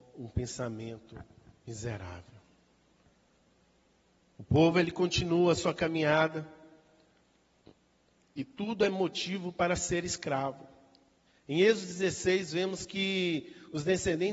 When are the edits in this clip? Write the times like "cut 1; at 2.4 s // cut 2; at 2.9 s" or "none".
none